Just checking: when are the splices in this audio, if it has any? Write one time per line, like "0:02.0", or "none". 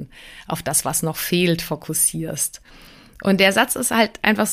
none